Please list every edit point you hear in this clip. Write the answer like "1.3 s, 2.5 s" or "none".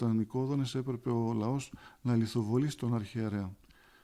none